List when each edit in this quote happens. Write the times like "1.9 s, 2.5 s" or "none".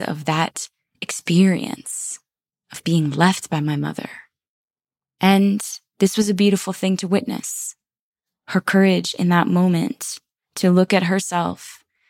none